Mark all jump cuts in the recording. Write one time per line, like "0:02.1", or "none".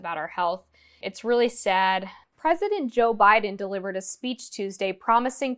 0:01.0
0:02.2